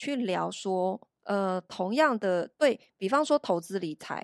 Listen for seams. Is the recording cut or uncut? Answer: cut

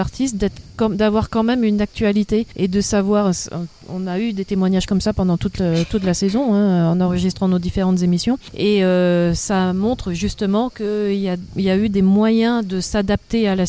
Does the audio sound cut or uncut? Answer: uncut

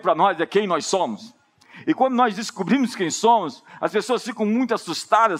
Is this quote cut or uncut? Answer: uncut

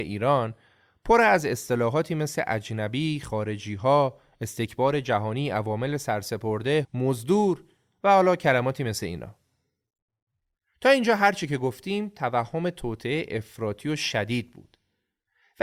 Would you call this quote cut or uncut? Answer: cut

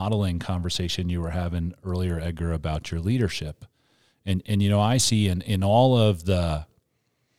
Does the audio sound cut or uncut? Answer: uncut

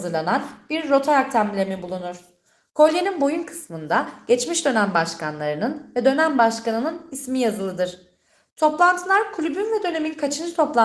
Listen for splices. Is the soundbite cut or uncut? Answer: uncut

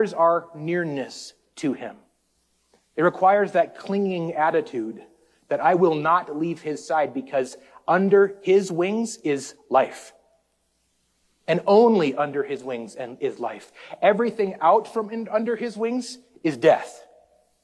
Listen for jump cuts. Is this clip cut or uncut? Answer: uncut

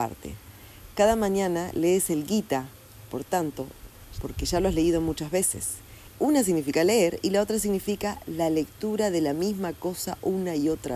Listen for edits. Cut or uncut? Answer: cut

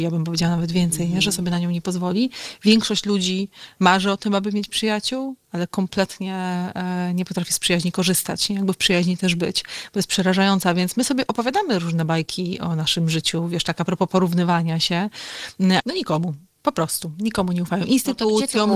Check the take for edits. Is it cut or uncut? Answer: cut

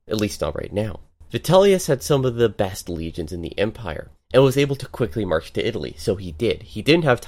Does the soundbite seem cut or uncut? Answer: uncut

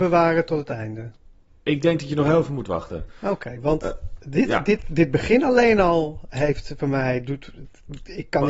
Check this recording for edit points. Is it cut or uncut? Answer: uncut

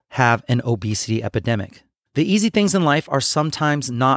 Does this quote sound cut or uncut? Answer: cut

